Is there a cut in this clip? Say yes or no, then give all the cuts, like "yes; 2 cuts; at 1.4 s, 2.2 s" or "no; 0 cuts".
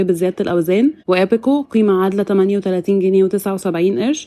yes; 1 cut; at 1.0 s